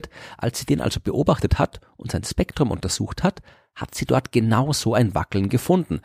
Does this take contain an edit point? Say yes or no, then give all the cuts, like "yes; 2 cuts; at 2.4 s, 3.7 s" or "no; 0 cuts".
no; 0 cuts